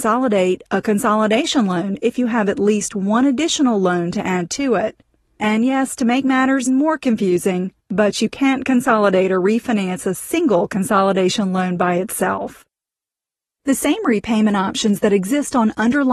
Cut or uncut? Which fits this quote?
cut